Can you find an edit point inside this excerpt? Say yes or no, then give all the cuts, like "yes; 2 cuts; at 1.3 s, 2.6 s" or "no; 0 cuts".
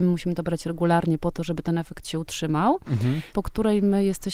yes; 1 cut; at 3.3 s